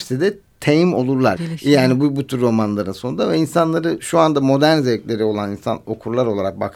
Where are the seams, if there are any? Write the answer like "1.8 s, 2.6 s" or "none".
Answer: 1.4 s